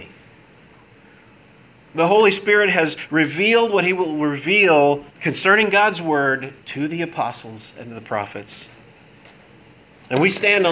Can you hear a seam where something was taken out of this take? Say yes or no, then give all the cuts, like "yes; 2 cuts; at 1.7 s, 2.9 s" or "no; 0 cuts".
yes; 2 cuts; at 5.1 s, 6.6 s